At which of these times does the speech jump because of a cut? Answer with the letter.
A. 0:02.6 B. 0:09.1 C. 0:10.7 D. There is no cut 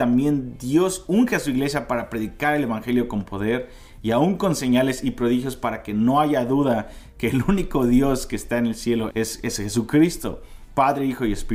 B